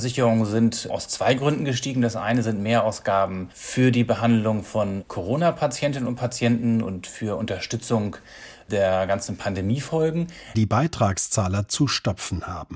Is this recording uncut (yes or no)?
no